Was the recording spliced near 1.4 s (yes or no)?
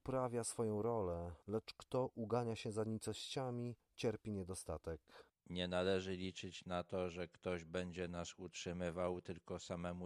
yes